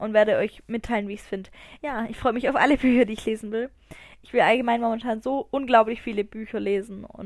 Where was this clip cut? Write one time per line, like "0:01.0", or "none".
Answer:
0:01.8